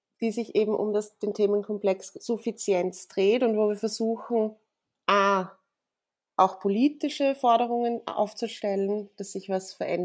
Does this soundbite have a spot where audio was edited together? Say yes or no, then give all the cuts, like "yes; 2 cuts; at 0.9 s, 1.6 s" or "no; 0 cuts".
no; 0 cuts